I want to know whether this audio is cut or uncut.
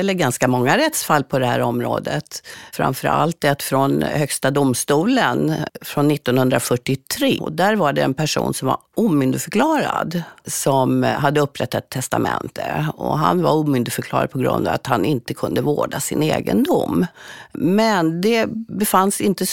cut